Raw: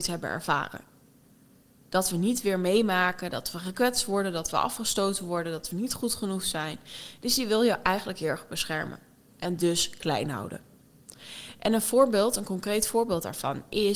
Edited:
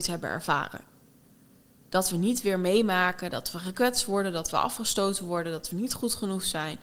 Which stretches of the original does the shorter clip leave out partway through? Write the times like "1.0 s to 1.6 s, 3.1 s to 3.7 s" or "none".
none